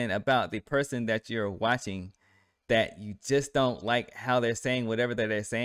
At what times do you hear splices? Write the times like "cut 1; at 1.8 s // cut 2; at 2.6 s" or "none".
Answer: none